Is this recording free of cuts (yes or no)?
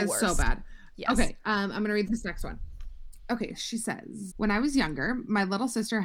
no